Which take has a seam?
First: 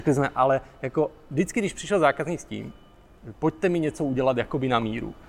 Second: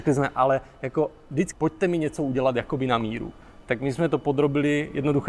second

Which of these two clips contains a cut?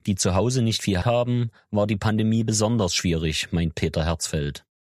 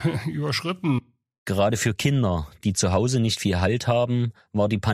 first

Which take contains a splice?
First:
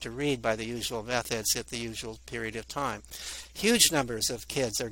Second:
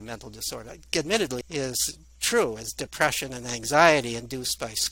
second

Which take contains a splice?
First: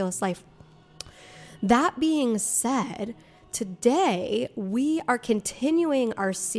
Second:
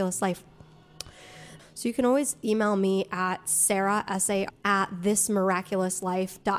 second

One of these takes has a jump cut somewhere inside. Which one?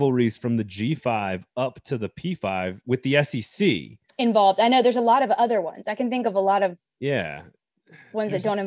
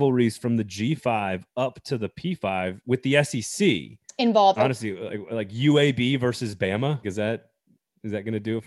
second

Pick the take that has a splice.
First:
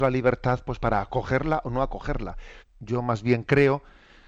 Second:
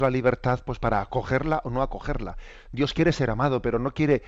first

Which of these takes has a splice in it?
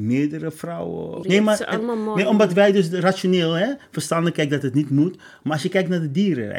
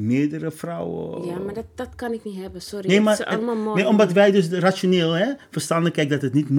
first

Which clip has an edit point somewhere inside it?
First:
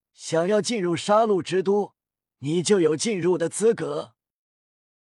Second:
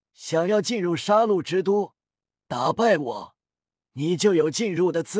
first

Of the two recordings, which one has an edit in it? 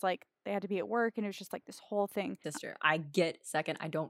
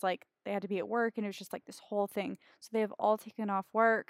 first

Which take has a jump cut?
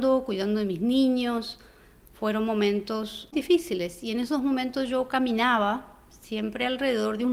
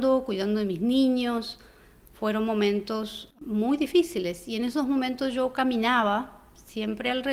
first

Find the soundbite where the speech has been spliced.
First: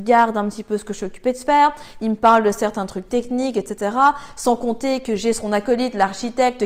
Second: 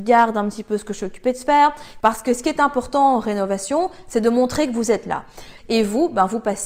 second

